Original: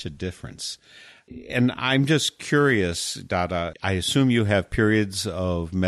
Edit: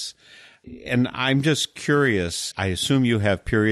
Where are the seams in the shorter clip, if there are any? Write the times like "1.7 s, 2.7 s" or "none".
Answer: 2.5 s